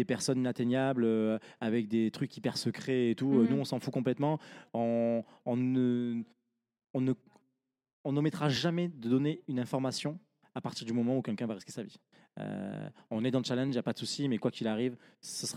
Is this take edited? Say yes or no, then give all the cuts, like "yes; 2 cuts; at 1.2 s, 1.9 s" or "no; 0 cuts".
no; 0 cuts